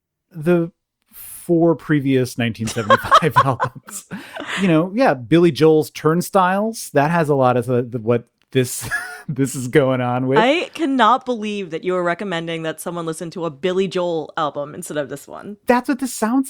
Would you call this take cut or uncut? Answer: uncut